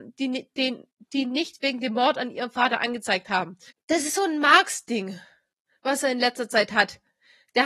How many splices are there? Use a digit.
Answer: 0